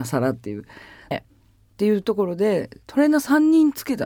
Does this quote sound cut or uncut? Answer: cut